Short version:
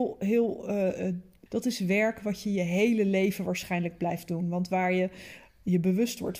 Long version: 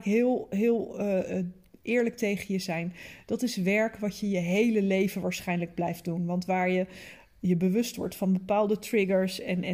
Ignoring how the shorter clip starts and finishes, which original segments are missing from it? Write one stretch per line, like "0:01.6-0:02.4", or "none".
0:01.8-0:03.2